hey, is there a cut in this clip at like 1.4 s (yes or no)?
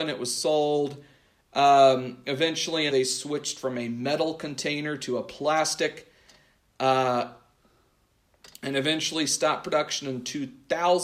no